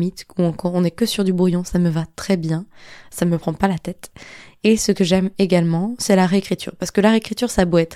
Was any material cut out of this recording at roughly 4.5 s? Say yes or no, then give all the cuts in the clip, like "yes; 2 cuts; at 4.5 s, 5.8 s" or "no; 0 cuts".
no; 0 cuts